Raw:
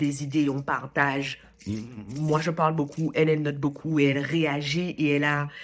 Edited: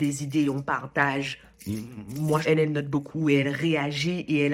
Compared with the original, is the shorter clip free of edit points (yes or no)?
no